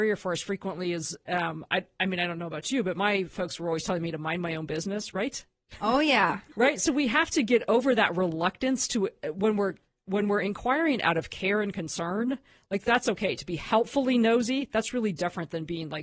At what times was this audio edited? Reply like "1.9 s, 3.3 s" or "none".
none